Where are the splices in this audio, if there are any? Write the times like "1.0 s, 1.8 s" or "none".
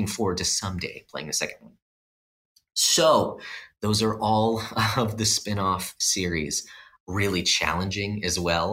7.0 s